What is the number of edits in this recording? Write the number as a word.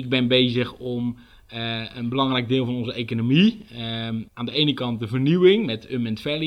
one